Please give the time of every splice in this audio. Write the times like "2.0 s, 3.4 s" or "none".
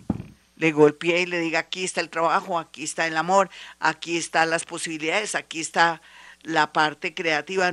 none